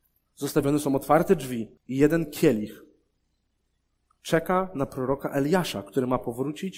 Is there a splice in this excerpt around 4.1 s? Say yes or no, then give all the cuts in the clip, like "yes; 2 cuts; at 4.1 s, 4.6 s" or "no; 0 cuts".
no; 1 cut; at 1.8 s